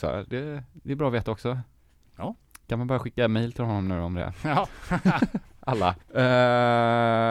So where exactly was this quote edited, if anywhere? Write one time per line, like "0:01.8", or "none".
0:06.0